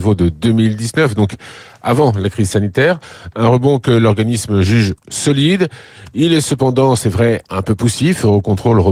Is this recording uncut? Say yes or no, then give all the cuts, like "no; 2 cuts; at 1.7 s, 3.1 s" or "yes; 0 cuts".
yes; 0 cuts